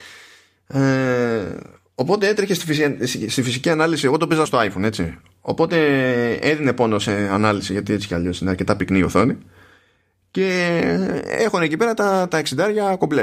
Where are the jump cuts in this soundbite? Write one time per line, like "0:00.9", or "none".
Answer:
0:04.5